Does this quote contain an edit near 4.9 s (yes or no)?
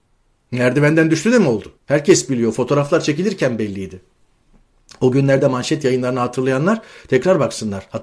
no